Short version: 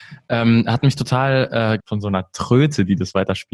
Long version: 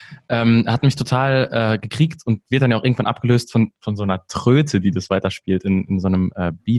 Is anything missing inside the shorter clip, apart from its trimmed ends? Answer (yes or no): yes